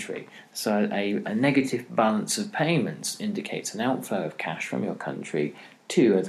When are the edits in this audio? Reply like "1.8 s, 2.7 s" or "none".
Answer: 1.2 s